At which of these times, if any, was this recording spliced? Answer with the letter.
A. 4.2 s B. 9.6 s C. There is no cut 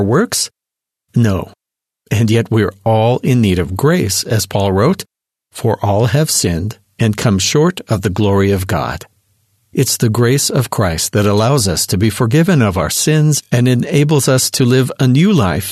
A